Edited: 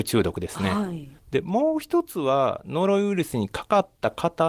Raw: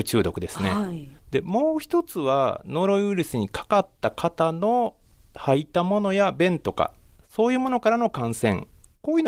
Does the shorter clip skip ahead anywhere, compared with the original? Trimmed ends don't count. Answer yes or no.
no